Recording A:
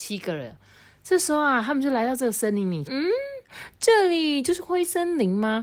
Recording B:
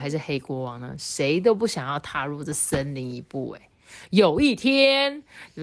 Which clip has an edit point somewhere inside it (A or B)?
A